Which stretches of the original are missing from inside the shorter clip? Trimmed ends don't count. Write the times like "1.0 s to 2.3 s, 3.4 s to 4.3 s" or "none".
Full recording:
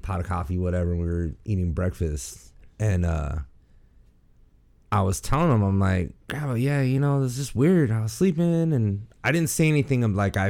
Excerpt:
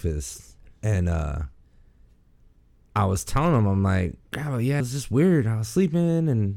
6.8 s to 7.2 s